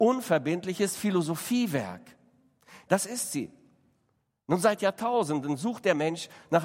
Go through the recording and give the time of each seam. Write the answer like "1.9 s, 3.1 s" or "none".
2.9 s